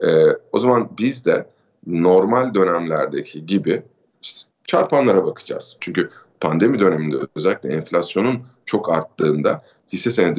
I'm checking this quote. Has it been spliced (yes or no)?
yes